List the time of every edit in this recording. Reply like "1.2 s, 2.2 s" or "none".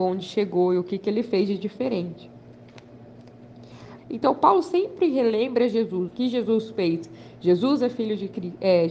4.0 s, 6.1 s